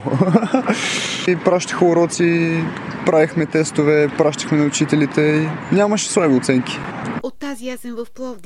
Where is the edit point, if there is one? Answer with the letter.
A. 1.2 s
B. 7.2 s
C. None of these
B